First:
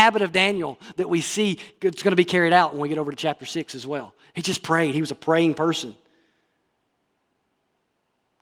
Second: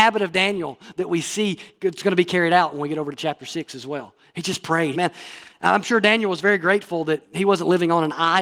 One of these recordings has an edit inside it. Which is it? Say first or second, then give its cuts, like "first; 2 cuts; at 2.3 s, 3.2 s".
second; 1 cut; at 4.9 s